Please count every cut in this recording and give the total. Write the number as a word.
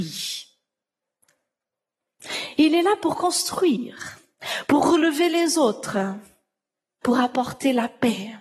two